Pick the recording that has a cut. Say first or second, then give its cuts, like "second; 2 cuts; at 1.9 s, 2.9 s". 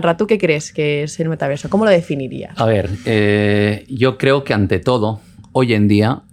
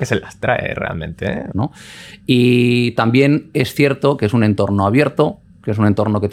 second; 1 cut; at 1.5 s